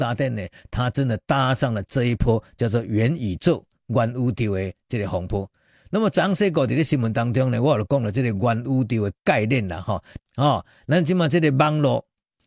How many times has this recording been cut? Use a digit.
1